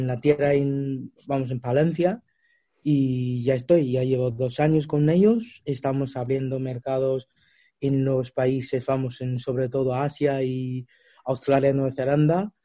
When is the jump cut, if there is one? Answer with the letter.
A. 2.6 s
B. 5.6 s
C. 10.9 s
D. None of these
D